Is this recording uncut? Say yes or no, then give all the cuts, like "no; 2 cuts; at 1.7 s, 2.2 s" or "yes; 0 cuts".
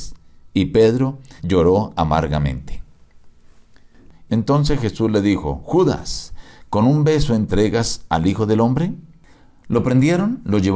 no; 2 cuts; at 1.4 s, 4.3 s